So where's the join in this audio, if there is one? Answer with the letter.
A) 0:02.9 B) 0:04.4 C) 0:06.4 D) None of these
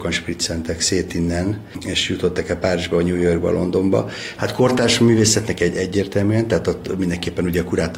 B